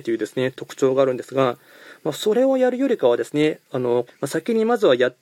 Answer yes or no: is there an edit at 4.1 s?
yes